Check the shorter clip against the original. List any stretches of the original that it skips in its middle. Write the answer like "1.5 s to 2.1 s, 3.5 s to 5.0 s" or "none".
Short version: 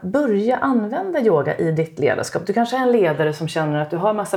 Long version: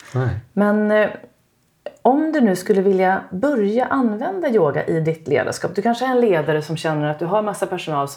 none